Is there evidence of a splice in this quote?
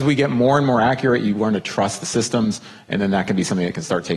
no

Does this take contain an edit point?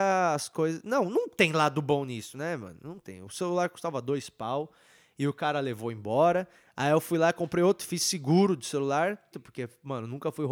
yes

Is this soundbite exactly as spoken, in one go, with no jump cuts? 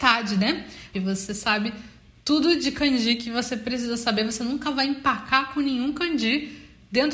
no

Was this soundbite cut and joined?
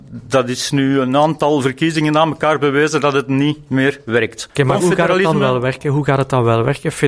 yes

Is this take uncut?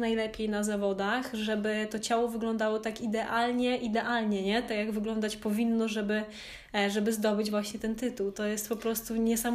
yes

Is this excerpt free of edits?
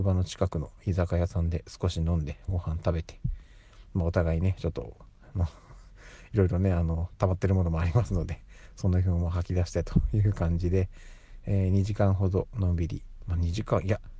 yes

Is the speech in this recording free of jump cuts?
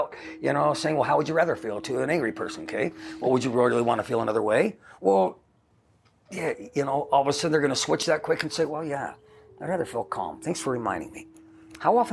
yes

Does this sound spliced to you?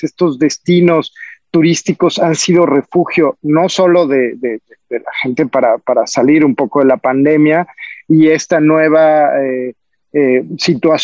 no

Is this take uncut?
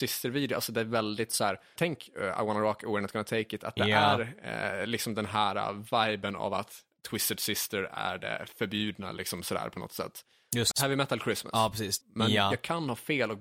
no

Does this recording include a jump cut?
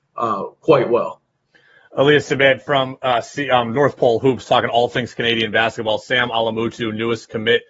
no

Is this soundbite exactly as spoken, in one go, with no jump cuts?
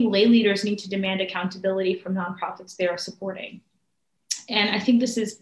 yes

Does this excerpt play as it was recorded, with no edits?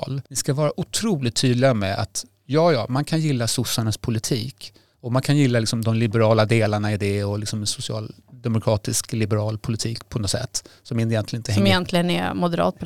yes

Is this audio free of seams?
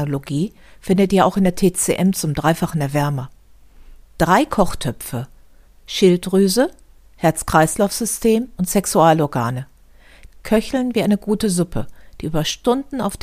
no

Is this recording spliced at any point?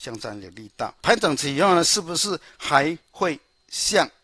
yes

